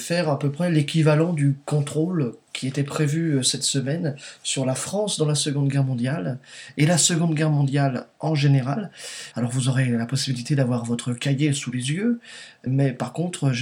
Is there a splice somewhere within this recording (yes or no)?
yes